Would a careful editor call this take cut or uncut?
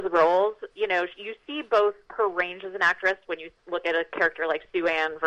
uncut